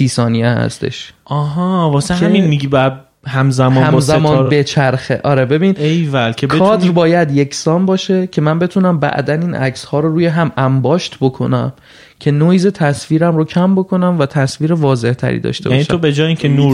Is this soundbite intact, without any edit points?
yes; 0 cuts

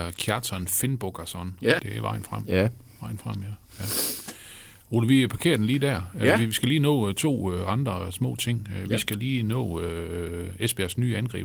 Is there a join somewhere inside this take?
yes; 1 cut; at 1.8 s

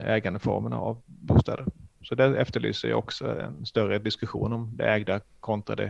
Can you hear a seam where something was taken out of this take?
yes; 1 cut; at 3.6 s

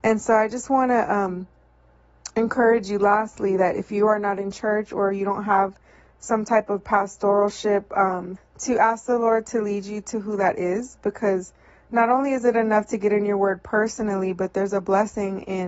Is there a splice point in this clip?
yes; 1 cut; at 8.4 s

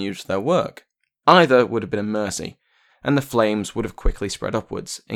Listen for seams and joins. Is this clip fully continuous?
no; 2 cuts; at 1.2 s, 2.9 s

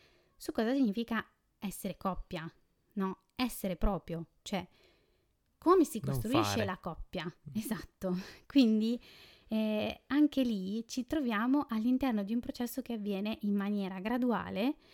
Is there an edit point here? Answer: no; 0 cuts

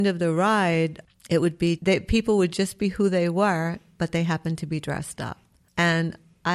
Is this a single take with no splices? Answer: no; 1 cut; at 1.8 s

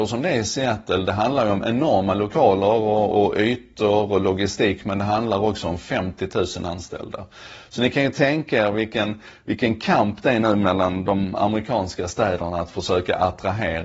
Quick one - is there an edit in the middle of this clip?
no; 0 cuts

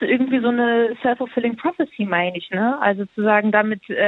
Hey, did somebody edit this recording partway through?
no; 0 cuts

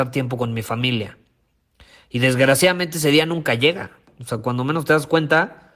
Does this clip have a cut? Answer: no; 0 cuts

